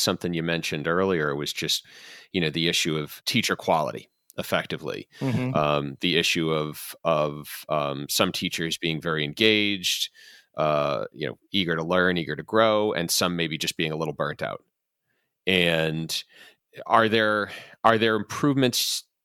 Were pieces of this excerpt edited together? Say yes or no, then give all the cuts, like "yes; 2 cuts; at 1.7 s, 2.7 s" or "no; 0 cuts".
no; 0 cuts